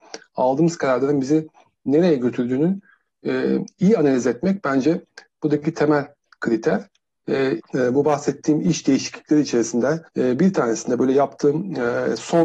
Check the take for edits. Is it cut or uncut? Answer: cut